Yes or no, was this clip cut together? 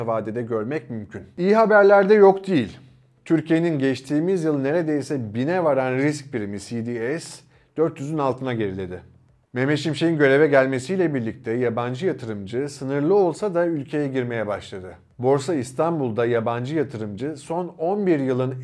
no